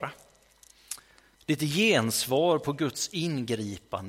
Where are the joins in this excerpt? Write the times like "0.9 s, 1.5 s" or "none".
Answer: 1.3 s